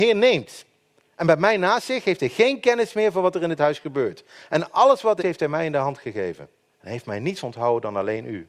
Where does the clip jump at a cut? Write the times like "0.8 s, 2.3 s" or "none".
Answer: 5.2 s, 6.7 s